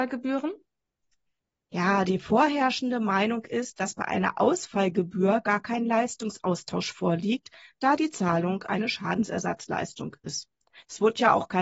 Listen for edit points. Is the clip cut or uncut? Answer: uncut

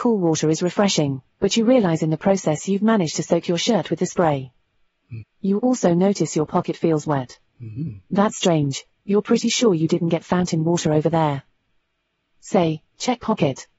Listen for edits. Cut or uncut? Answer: cut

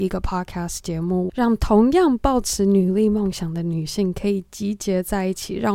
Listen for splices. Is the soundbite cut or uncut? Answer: cut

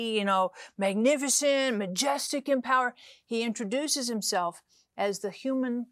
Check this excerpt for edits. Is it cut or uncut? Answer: uncut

